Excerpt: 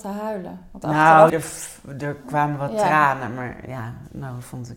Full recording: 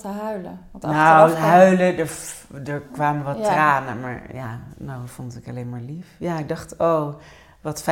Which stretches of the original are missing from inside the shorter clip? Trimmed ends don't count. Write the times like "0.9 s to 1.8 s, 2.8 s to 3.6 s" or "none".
1.3 s to 2.0 s